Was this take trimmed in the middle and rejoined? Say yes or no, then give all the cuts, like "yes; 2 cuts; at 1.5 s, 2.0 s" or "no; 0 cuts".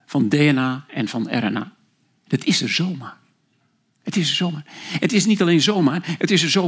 no; 0 cuts